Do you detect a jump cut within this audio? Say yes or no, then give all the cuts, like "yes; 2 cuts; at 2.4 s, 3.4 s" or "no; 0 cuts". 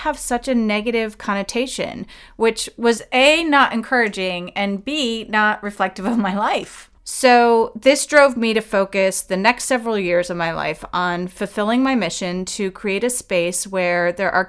yes; 1 cut; at 7.0 s